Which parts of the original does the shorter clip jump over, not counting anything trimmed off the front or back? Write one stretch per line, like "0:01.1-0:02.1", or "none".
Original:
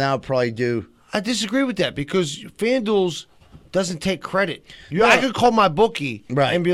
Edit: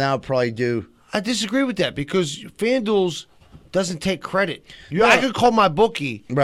none